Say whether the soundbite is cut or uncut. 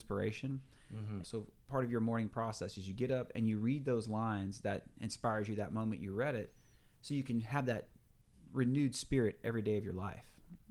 cut